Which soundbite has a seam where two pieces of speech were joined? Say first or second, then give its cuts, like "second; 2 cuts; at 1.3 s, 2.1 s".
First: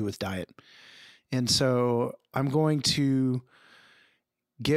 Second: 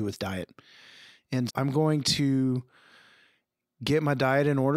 second; 1 cut; at 1.5 s